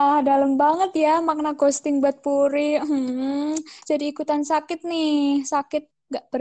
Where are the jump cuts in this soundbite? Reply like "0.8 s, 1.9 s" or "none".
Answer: none